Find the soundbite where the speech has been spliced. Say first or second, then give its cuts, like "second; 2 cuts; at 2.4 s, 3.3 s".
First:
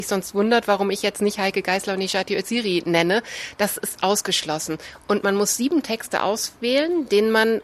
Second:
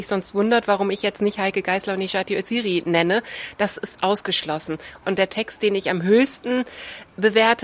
second; 1 cut; at 5.0 s